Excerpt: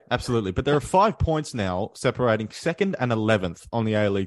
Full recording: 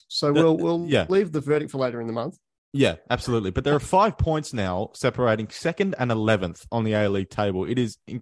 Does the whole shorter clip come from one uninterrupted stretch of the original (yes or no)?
yes